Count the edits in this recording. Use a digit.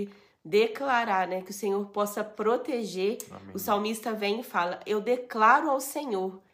0